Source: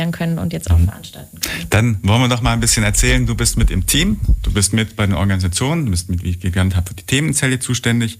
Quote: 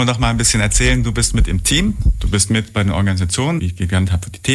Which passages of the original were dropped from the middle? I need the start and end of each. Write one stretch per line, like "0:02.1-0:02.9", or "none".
0:05.8-0:06.2